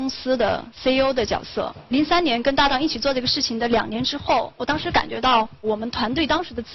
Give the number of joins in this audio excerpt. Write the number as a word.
one